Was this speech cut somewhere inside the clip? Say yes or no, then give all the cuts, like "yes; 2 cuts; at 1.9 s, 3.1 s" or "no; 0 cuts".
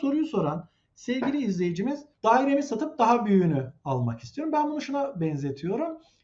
yes; 1 cut; at 2.1 s